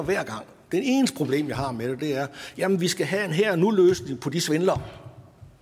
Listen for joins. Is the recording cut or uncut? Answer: uncut